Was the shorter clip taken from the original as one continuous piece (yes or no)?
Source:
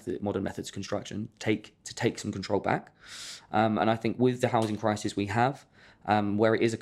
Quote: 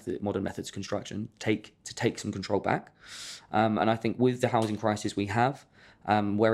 yes